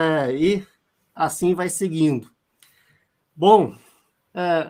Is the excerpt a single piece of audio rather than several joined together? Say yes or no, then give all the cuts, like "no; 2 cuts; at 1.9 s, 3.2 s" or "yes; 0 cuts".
yes; 0 cuts